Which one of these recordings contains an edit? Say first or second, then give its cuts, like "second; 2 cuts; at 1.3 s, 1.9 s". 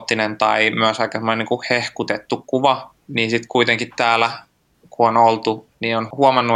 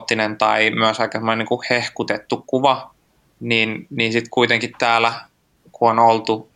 first; 1 cut; at 3.1 s